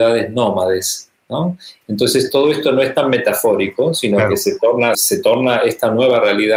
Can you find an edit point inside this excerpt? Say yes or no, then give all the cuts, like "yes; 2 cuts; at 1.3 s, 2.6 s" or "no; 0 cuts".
yes; 2 cuts; at 1.8 s, 4.9 s